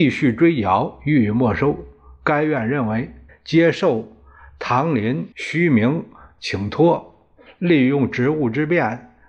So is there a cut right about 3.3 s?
yes; 2 cuts; at 3.3 s, 5.3 s

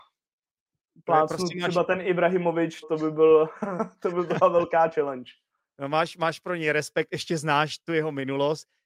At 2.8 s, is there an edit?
yes; 1 cut; at 2.8 s

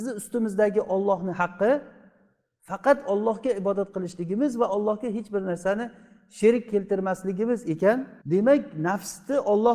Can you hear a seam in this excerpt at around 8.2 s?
yes; 1 cut; at 8.2 s

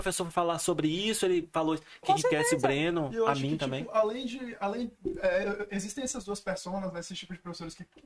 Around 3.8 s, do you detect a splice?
no; 1 cut; at 2.0 s

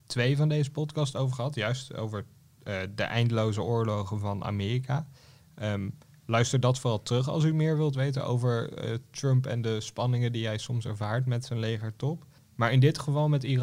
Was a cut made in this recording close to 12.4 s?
yes; 1 cut; at 12.4 s

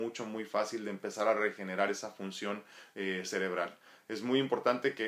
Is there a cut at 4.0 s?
no; 0 cuts

